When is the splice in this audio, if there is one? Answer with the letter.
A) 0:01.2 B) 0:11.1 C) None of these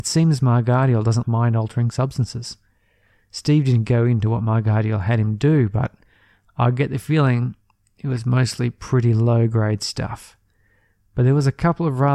A